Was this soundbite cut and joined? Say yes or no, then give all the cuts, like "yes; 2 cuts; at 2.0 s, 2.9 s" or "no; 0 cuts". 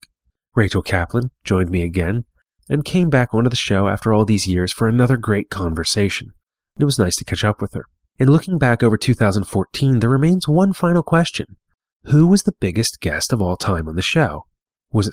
yes; 2 cuts; at 2.6 s, 8.1 s